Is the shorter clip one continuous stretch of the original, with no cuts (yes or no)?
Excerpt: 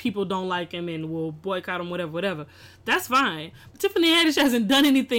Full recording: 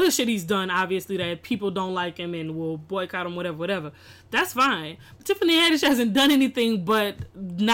yes